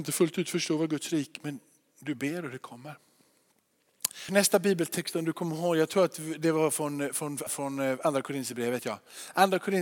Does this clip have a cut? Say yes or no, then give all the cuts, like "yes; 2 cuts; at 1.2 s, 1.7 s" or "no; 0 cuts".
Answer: yes; 2 cuts; at 4.3 s, 7.5 s